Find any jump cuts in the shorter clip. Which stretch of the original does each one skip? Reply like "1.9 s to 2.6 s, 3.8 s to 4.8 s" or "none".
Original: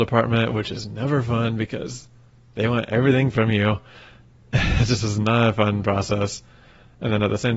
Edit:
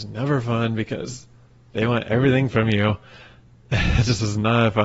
none